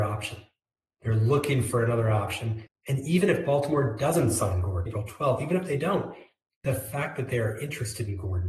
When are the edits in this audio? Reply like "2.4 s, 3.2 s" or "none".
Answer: 2.7 s, 4.9 s